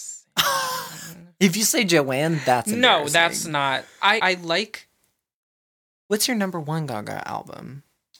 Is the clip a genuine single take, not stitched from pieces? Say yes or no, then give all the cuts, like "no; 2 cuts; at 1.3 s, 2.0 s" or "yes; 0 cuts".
no; 1 cut; at 4.2 s